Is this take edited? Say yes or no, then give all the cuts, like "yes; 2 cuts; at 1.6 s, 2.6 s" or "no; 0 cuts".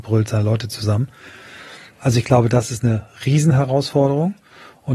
no; 0 cuts